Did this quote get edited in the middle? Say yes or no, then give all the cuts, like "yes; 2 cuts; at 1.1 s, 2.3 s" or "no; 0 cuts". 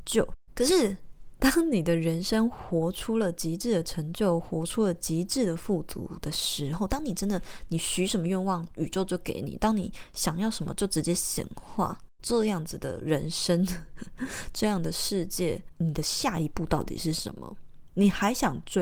no; 0 cuts